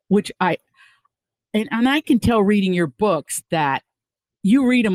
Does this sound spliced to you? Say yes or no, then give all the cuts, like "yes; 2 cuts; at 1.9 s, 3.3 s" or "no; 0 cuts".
no; 0 cuts